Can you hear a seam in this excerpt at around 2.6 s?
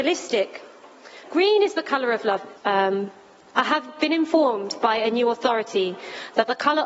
yes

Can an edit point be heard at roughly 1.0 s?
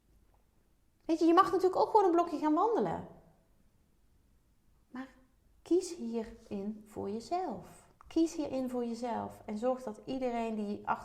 no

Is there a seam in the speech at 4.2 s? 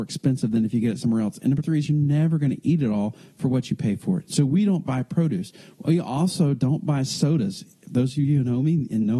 no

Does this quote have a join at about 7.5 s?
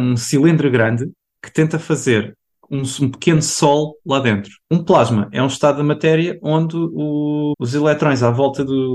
yes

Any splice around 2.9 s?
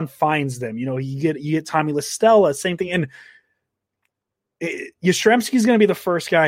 no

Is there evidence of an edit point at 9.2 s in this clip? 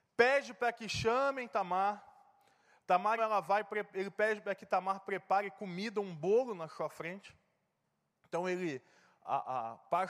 no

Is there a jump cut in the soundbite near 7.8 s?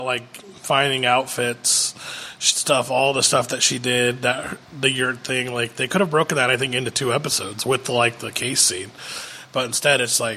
no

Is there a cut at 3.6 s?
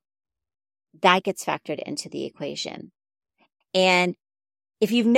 yes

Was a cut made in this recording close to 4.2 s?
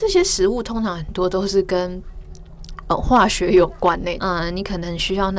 yes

